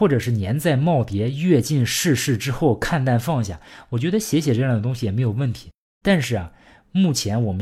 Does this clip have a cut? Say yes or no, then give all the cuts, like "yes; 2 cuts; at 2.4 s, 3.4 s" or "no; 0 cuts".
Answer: yes; 1 cut; at 6.0 s